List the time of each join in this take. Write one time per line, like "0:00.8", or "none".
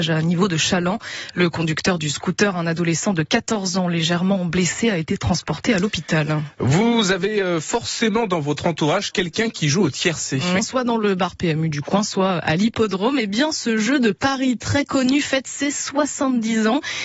0:10.6

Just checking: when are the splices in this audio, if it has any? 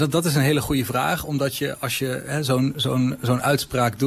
none

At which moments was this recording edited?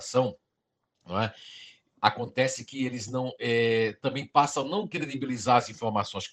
none

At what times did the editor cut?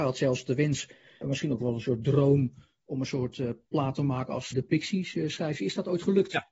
0:01.2
0:04.5

